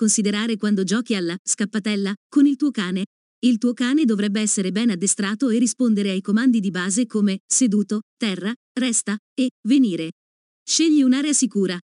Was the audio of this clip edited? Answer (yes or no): yes